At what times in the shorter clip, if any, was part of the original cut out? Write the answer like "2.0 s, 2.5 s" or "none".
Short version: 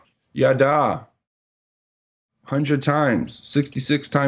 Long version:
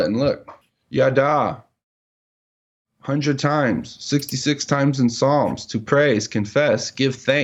none